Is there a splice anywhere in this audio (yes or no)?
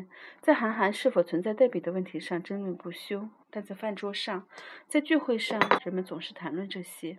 yes